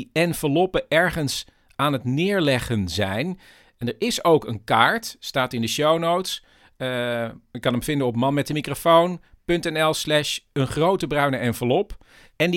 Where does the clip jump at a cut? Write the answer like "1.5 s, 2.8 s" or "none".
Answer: none